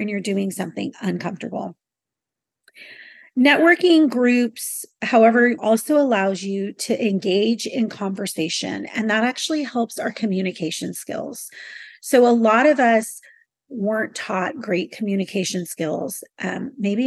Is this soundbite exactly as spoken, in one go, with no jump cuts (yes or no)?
no